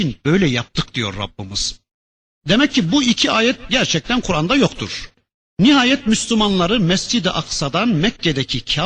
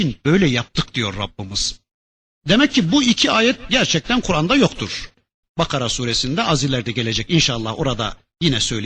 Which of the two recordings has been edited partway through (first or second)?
second